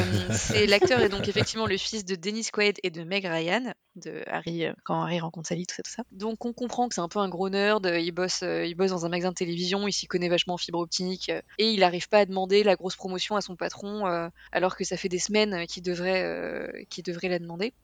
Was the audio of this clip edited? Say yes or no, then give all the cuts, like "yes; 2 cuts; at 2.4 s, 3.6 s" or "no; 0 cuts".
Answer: yes; 1 cut; at 11.5 s